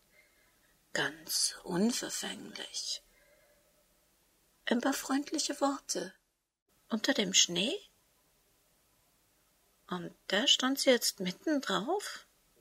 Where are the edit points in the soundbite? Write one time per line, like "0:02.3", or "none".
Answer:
0:06.7